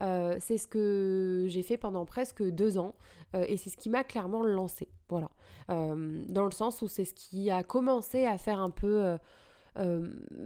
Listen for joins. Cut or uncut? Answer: uncut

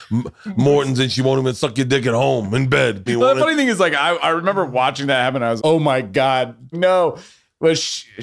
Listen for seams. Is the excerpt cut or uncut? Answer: cut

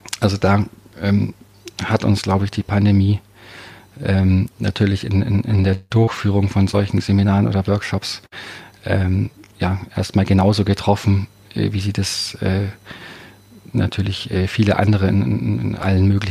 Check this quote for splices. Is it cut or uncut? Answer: uncut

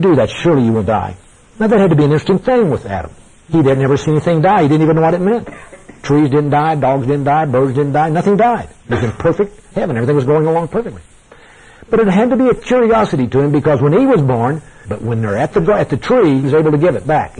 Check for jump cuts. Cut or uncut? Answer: cut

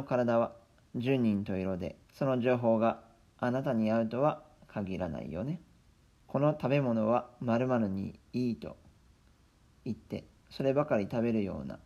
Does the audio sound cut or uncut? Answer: cut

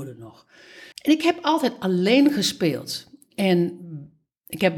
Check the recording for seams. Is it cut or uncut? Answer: cut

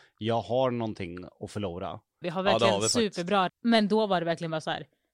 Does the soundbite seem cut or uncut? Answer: cut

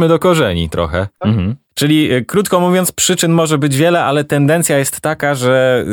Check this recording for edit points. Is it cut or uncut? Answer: cut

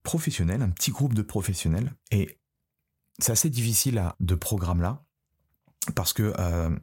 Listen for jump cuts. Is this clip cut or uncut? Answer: cut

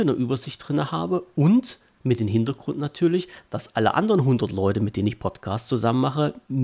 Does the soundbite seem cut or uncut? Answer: uncut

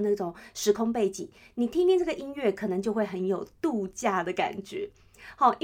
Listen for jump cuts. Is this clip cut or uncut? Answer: uncut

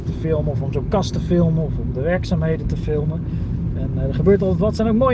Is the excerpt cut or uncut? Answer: uncut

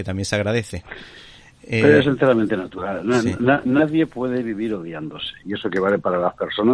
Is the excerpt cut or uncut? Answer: uncut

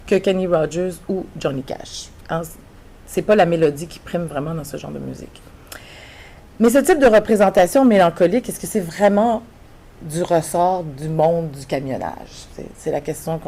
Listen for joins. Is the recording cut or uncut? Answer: uncut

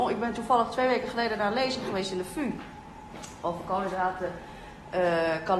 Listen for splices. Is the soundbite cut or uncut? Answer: uncut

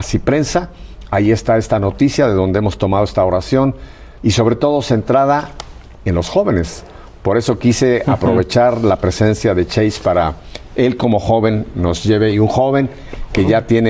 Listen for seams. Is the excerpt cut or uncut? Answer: cut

